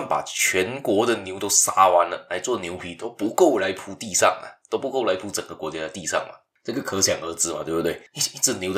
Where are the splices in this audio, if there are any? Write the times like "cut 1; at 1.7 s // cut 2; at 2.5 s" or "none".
none